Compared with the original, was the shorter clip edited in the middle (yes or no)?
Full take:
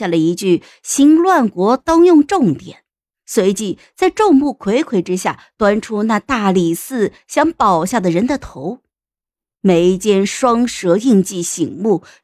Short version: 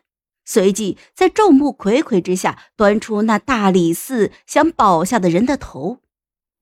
no